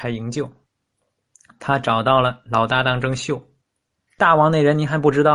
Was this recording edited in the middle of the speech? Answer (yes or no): yes